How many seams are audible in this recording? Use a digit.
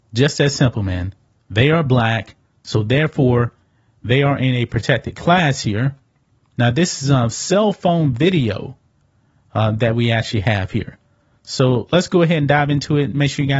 1